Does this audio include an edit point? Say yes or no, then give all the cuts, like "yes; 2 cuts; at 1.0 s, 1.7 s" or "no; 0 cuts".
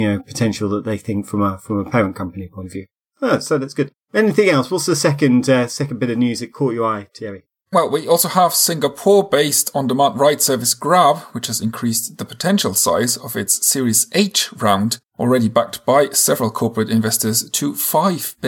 yes; 1 cut; at 15.1 s